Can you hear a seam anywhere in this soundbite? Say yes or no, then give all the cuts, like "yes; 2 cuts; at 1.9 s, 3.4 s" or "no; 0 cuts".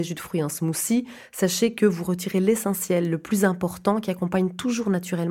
no; 0 cuts